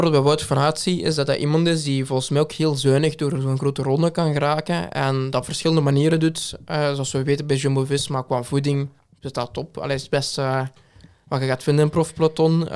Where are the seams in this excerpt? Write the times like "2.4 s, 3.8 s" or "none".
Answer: none